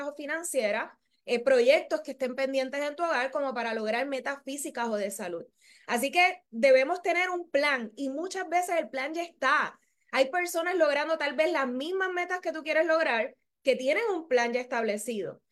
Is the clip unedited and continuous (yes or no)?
yes